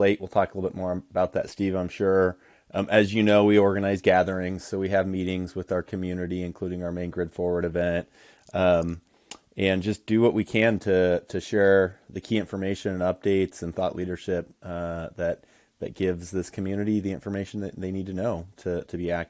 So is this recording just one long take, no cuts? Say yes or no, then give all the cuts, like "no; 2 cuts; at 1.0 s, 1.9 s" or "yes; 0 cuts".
yes; 0 cuts